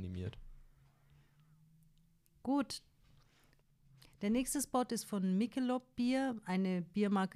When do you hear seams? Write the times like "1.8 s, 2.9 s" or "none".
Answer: none